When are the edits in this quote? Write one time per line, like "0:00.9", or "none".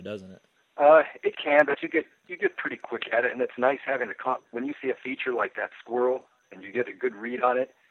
none